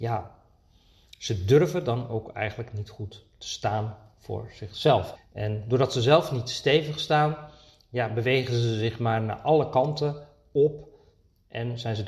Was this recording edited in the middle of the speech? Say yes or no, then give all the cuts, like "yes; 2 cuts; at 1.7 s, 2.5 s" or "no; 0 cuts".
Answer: yes; 1 cut; at 5.2 s